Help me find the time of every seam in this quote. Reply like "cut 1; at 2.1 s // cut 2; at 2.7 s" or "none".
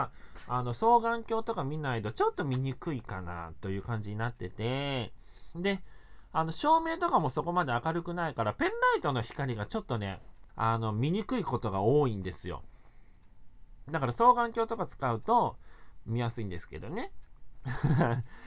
cut 1; at 10.5 s